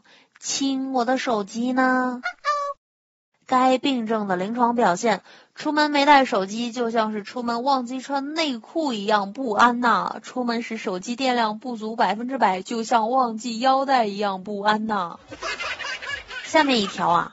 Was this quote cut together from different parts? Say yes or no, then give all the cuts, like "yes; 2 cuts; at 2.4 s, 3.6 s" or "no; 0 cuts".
no; 0 cuts